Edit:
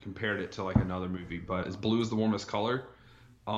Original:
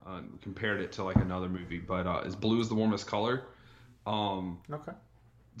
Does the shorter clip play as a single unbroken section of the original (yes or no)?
no